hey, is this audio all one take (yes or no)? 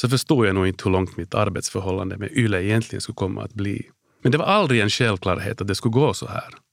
no